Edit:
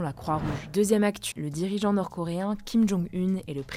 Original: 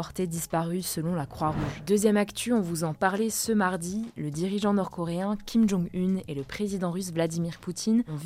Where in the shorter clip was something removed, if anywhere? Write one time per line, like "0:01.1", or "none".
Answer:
0:01.3